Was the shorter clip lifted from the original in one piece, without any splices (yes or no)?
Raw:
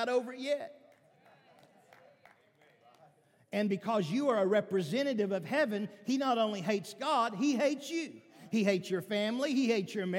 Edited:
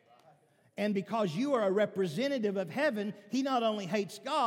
yes